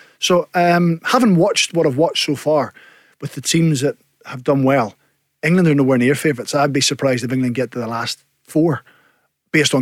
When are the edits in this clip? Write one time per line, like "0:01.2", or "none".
none

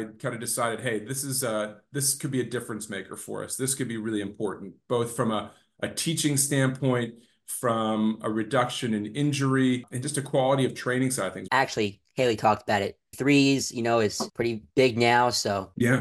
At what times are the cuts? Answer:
0:11.5
0:13.1

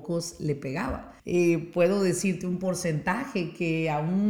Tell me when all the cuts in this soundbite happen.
0:01.2

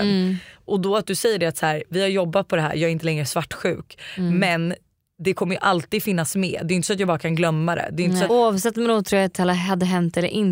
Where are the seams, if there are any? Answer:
0:08.3

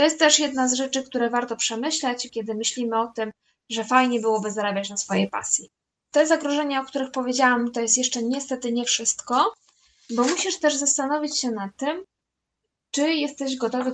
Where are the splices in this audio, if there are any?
0:02.3

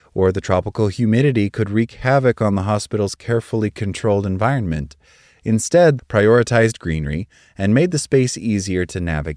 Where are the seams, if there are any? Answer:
0:06.0

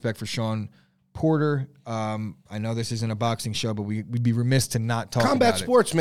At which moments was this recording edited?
none

